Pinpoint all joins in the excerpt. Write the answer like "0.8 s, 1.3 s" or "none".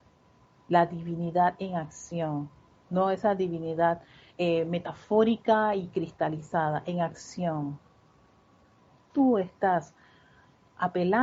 9.1 s